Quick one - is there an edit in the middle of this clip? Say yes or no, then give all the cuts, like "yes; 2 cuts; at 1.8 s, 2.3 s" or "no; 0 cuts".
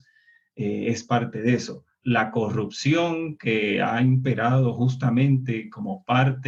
no; 0 cuts